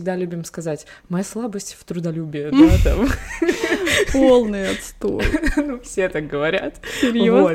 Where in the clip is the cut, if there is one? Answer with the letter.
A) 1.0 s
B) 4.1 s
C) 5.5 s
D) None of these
D